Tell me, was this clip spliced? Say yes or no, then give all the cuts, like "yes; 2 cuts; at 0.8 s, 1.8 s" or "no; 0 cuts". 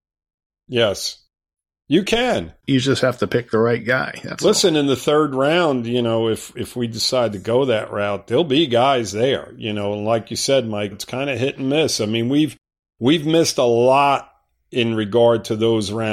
yes; 1 cut; at 10.9 s